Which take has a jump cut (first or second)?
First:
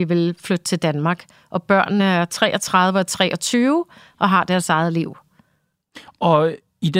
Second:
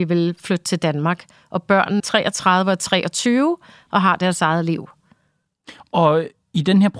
second